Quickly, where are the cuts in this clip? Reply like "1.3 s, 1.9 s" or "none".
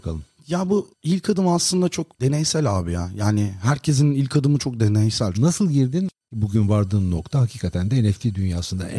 5.3 s